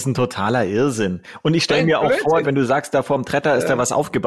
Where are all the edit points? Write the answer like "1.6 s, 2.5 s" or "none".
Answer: 2.4 s